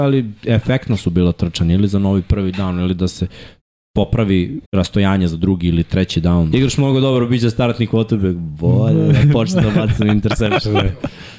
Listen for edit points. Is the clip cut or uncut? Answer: cut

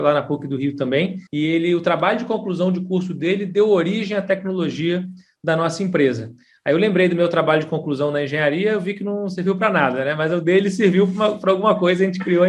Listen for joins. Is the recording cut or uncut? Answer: cut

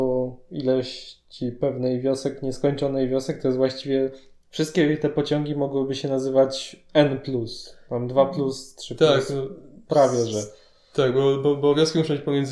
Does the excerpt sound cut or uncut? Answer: uncut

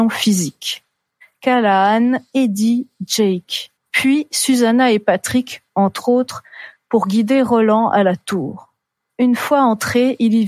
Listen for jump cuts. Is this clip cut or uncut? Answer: cut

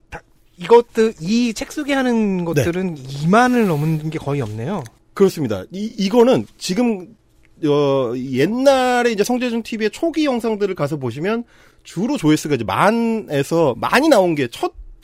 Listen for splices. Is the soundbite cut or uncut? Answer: uncut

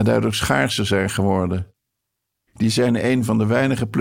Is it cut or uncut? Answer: cut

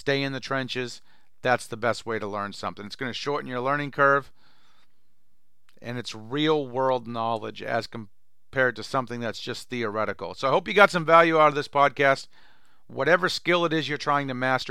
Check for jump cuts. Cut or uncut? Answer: uncut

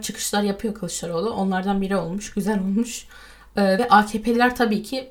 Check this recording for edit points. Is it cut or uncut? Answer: uncut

